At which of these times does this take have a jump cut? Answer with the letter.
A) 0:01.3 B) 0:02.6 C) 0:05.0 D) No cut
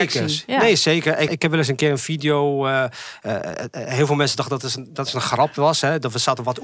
A